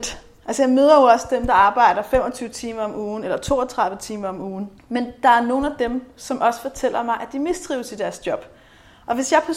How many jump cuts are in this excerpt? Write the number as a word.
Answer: one